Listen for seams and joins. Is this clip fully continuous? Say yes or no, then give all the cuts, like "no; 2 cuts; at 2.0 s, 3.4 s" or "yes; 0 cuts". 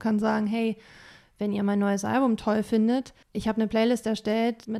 no; 1 cut; at 3.2 s